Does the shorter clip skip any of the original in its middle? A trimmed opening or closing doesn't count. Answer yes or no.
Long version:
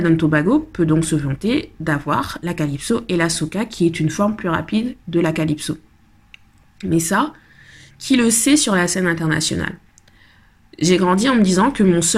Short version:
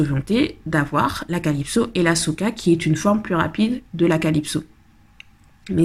no